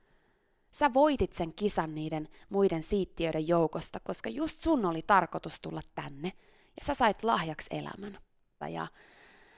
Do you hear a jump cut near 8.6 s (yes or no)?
yes